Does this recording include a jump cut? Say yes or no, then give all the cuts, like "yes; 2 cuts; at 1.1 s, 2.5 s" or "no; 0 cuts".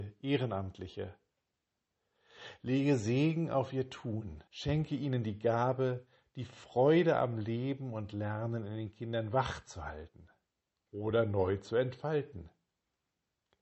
yes; 1 cut; at 4.5 s